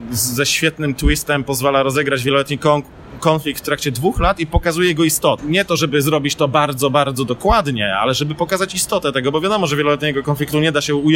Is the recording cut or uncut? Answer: cut